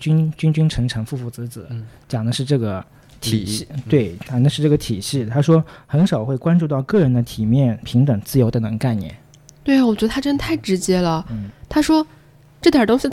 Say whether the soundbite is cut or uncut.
cut